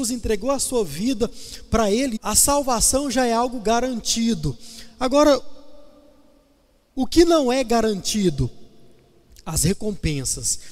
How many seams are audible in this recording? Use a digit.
1